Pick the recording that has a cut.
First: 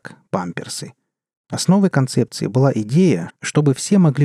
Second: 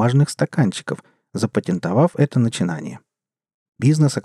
first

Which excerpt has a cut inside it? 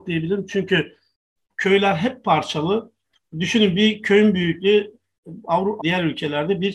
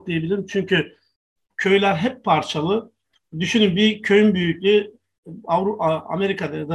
first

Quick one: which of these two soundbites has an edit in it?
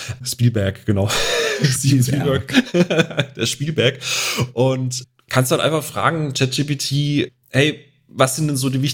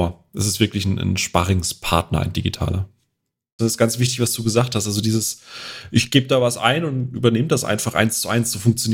second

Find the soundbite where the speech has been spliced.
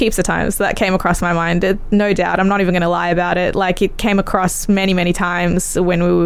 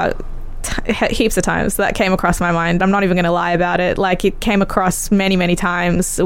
second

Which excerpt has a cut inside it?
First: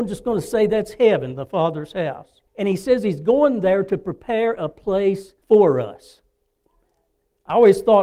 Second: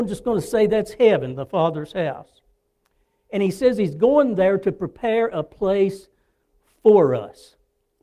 first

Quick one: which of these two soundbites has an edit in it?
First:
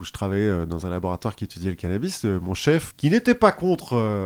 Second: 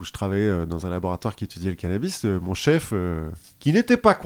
first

